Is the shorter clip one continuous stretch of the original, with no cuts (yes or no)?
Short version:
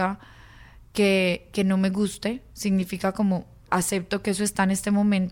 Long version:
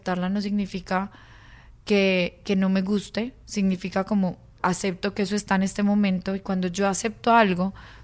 yes